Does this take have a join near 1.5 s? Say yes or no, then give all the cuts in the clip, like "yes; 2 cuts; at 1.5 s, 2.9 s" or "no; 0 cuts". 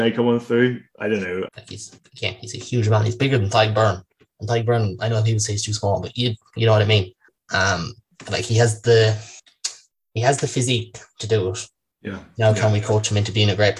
yes; 1 cut; at 1.5 s